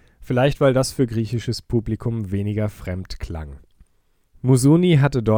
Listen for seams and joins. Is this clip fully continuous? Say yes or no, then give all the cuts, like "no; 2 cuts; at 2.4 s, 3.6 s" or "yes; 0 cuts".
no; 1 cut; at 4.3 s